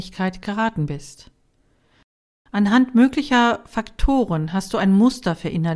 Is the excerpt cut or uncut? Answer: uncut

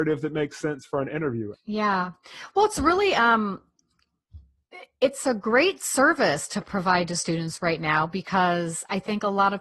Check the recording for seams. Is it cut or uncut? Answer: cut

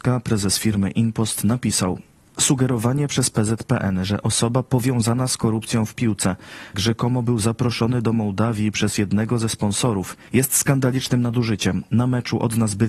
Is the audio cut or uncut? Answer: cut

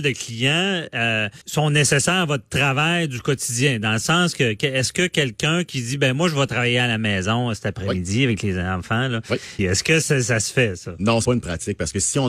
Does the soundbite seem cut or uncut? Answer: cut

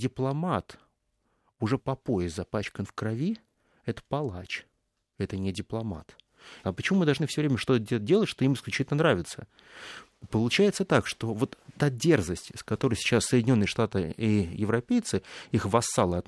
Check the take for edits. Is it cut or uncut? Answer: cut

